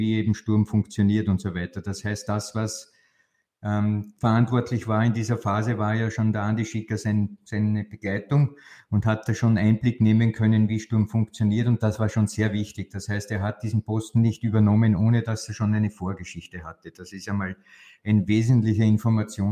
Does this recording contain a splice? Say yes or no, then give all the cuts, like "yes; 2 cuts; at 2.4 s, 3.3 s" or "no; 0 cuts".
yes; 1 cut; at 4.2 s